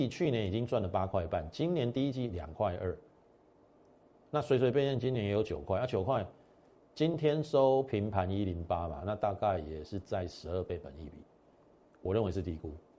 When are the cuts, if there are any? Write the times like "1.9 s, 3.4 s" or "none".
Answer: none